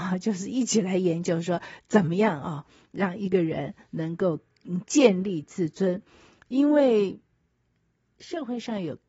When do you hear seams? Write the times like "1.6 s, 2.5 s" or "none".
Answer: none